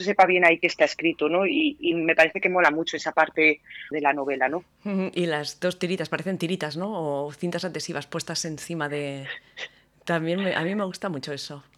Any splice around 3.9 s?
yes; 1 cut; at 3.9 s

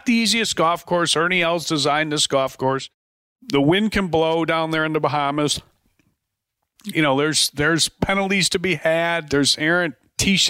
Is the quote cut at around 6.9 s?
yes; 1 cut; at 6.9 s

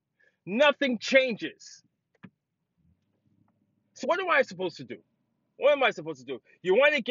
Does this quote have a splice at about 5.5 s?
no; 1 cut; at 4.0 s

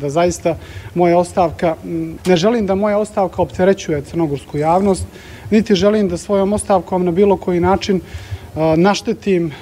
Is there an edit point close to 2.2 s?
yes; 1 cut; at 2.2 s

